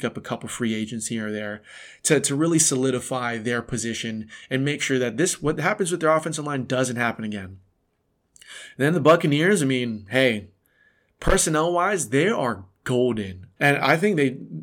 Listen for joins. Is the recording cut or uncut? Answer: cut